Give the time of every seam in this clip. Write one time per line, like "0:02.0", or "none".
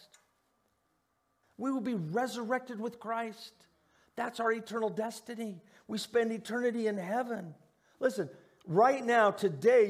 0:01.4